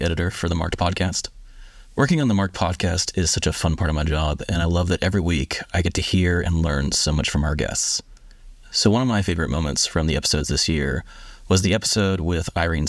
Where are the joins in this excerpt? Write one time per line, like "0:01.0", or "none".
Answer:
0:08.6